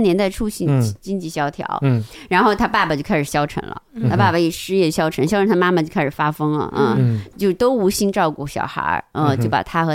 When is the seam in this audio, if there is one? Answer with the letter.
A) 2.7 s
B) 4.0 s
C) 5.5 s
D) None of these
D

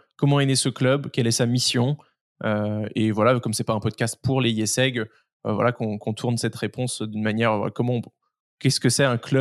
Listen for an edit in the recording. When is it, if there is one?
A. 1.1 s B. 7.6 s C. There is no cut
C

